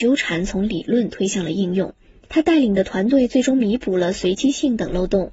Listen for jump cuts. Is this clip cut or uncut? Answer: cut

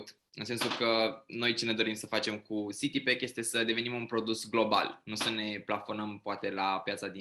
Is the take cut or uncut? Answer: uncut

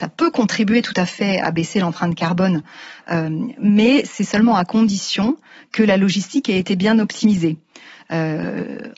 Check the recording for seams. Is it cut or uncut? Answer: uncut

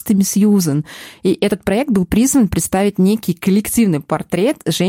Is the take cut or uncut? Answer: uncut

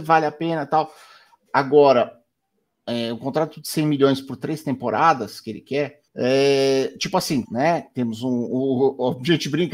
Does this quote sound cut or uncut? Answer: cut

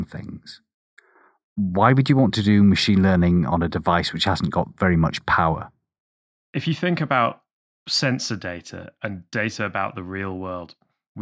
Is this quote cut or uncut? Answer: uncut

